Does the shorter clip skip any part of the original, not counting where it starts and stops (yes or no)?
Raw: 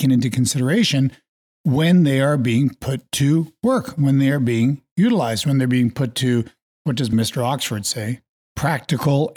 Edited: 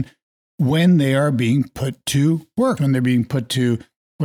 yes